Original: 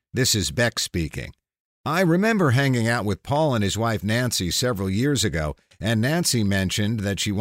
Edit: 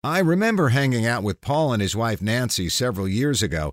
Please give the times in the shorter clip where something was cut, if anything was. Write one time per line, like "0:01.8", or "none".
none